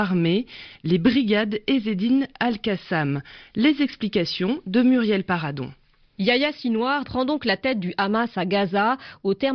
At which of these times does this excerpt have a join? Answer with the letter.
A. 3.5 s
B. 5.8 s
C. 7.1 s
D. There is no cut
C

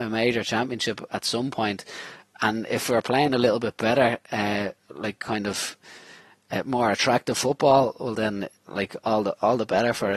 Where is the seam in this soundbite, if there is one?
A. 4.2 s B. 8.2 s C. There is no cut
C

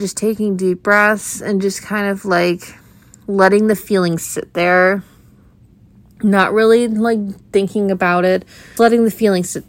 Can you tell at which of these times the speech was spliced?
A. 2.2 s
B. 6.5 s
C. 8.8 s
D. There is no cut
C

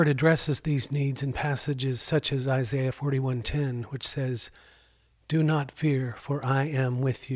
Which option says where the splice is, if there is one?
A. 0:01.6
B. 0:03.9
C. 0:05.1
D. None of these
D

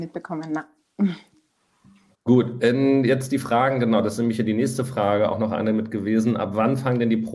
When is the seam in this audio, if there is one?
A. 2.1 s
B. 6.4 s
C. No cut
A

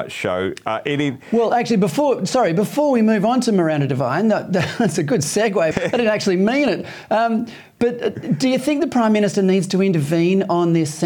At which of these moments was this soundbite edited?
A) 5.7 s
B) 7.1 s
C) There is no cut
A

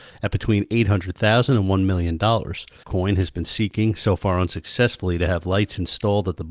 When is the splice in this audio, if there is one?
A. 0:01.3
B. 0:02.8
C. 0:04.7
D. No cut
B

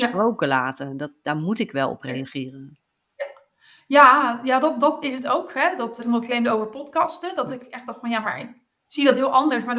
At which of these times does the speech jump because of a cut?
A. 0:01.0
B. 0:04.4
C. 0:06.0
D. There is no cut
C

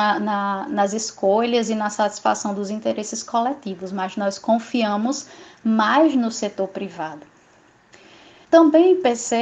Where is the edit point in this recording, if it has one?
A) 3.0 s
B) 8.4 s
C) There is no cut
B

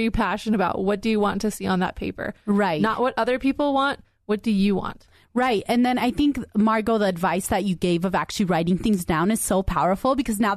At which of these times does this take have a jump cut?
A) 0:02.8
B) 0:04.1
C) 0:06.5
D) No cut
D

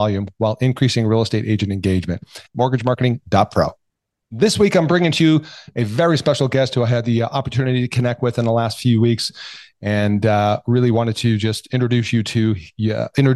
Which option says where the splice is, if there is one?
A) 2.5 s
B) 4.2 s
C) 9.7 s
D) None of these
A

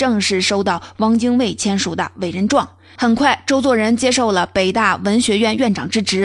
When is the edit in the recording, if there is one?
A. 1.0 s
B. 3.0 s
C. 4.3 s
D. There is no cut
B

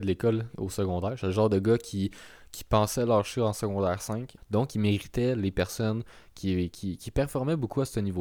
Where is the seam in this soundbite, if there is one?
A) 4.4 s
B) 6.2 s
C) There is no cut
A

